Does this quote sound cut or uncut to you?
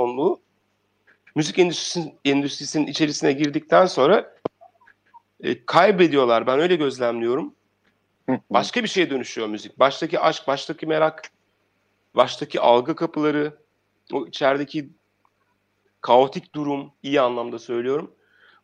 cut